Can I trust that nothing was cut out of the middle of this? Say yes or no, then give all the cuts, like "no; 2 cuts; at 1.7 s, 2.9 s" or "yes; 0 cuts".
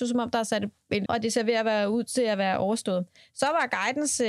no; 1 cut; at 1.1 s